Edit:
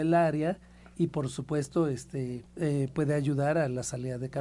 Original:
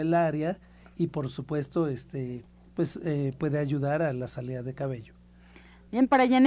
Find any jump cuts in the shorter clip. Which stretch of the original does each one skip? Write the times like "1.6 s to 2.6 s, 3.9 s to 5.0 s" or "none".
2.6 s to 3.0 s

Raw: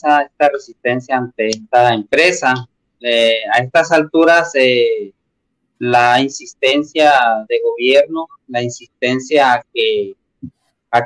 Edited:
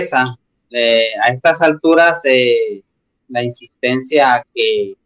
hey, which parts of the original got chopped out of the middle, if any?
5.5 s to 8.4 s

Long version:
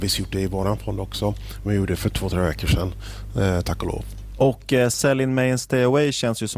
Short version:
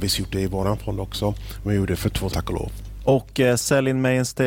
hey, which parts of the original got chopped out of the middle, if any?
2.3 s to 3.6 s

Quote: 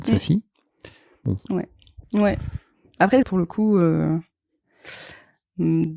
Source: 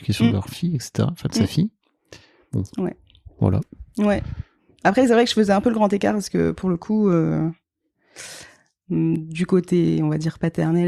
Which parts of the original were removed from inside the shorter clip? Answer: 3.3 s to 3.9 s, 5.1 s to 6.5 s

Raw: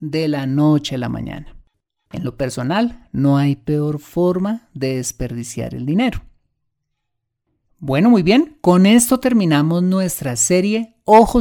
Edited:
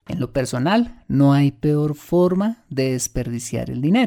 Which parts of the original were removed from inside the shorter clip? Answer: none

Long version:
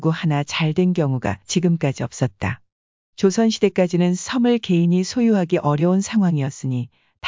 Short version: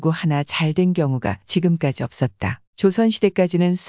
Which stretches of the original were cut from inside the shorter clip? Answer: 2.7 s to 3.1 s

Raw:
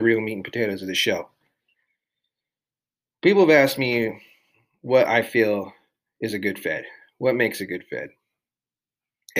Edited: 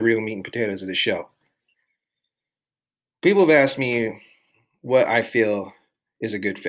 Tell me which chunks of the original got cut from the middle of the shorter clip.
none

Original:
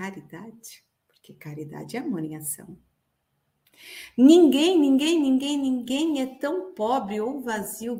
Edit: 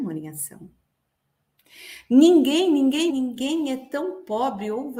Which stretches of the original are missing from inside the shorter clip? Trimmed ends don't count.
5.2 s to 5.6 s

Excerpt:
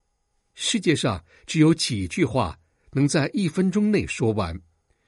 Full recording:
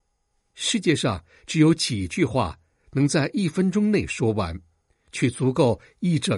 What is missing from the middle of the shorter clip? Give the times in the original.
none

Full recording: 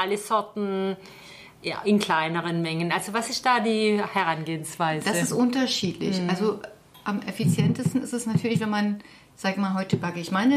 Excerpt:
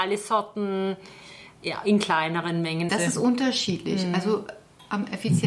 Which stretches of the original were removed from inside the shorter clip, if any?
2.9 s to 5.0 s

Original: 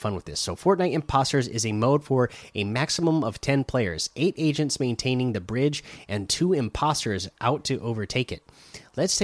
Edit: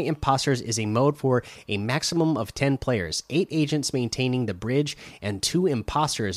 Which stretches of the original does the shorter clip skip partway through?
none

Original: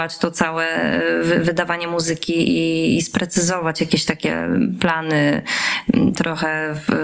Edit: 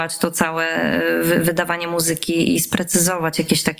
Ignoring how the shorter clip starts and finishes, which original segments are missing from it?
2.6 s to 3.0 s

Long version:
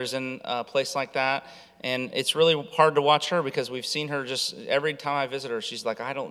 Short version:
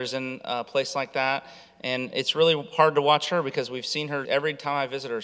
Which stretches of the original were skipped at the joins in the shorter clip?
4.3 s to 4.7 s

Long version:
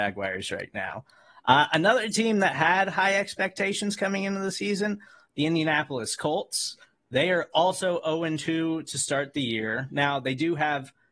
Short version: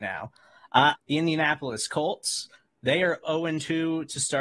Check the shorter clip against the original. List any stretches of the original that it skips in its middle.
1.7 s to 5.2 s, 7.5 s to 8.0 s

